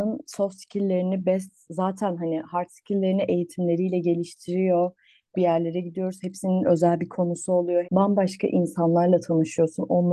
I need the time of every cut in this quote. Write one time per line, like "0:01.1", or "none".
0:05.3
0:07.8